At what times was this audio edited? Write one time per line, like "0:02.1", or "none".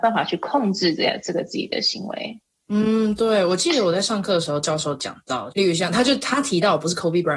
0:05.5